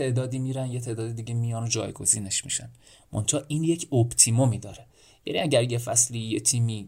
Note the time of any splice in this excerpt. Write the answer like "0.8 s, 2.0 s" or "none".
none